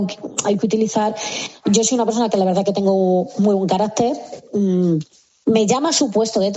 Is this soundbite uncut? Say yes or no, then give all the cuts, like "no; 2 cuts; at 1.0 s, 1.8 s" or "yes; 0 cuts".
no; 1 cut; at 5.4 s